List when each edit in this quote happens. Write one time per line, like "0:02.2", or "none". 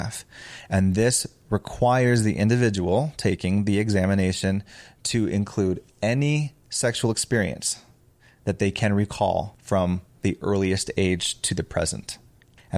none